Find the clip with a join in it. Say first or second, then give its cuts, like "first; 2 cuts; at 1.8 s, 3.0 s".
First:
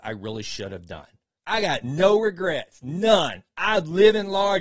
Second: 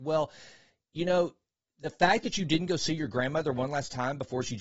first; 1 cut; at 1.4 s